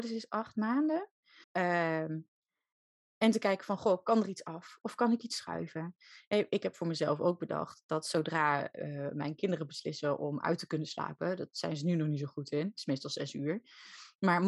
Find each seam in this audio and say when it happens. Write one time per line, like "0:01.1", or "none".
0:01.4